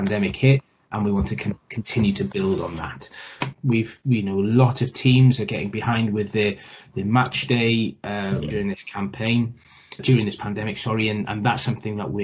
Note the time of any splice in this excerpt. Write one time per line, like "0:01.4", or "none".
0:03.5
0:08.5
0:10.0

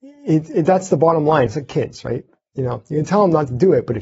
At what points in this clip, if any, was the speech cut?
0:01.5

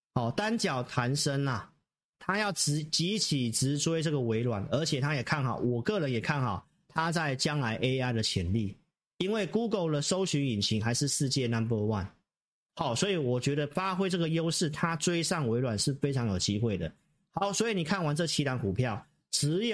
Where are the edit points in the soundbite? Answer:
none

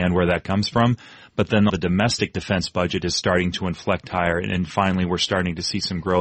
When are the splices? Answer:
0:01.7

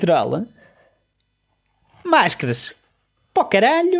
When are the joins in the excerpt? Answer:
none

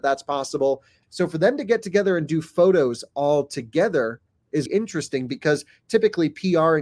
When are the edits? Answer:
0:01.0
0:04.7

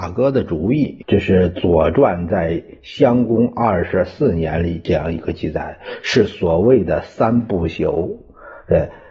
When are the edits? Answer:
0:01.0

